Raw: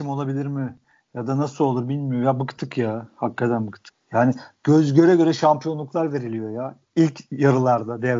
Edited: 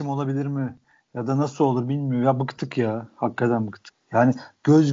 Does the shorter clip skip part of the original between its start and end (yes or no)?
no